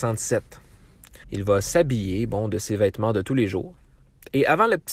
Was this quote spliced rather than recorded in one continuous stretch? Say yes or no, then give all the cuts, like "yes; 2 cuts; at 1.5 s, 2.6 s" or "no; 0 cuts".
yes; 1 cut; at 1.2 s